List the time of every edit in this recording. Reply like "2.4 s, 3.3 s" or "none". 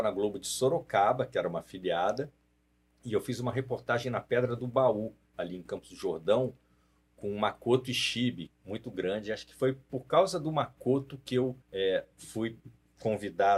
8.5 s, 11.6 s